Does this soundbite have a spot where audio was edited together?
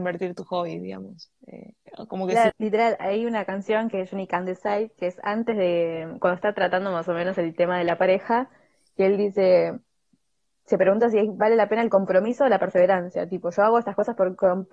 yes; 1 cut; at 2.5 s

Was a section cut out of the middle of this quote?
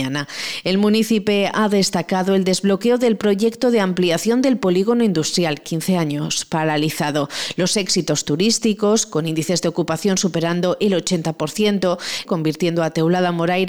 yes; 1 cut; at 12.2 s

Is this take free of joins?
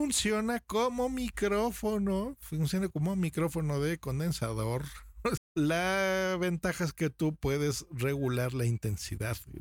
no; 1 cut; at 5.4 s

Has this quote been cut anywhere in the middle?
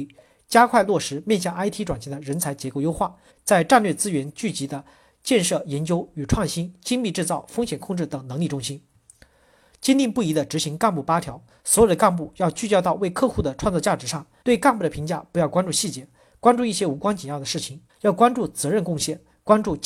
yes; 3 cuts; at 3.3 s, 14.4 s, 17.9 s

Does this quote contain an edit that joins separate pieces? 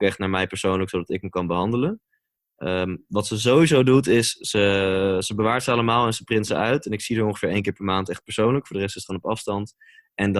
no; 0 cuts

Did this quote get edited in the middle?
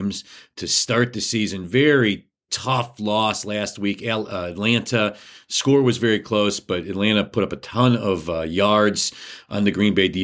no; 0 cuts

